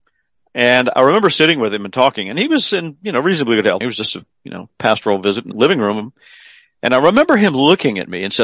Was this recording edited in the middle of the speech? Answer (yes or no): yes